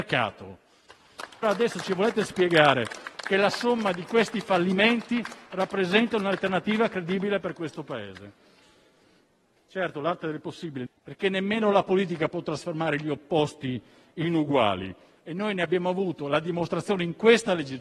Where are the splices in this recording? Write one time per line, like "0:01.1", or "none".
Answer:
0:01.4
0:09.6
0:10.9